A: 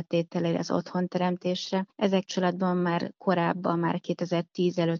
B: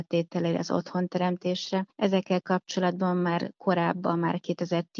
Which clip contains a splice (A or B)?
A